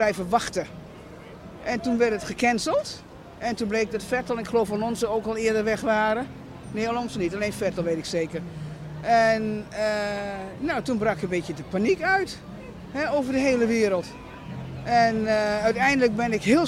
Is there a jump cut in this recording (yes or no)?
no